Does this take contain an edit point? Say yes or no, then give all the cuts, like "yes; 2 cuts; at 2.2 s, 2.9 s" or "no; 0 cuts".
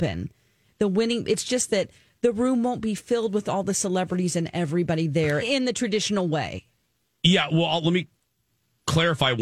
yes; 1 cut; at 5.4 s